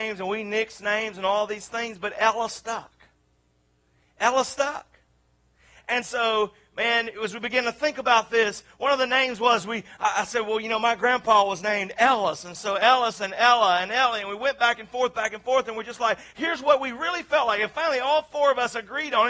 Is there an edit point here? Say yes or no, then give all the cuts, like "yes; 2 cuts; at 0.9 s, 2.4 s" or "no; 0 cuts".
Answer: no; 0 cuts